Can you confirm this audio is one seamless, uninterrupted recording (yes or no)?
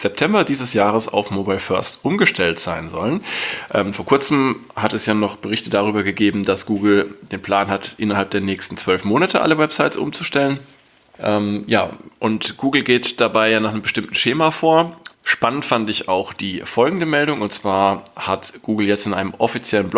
no